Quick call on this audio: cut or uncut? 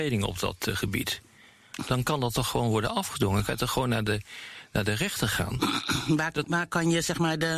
cut